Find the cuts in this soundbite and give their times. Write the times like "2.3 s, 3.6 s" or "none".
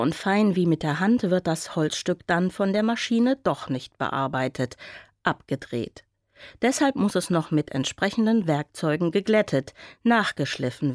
none